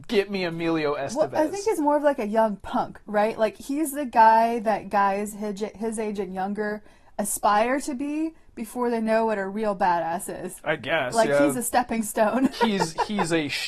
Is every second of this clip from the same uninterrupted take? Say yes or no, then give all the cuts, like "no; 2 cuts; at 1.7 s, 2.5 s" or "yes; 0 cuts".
no; 1 cut; at 12.5 s